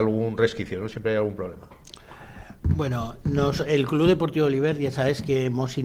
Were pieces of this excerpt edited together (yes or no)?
no